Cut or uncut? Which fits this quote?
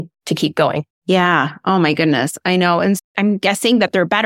cut